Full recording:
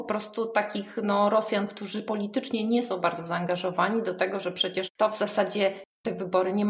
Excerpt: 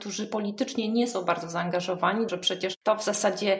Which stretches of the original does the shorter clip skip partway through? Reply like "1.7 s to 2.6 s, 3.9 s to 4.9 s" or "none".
4.0 s to 4.4 s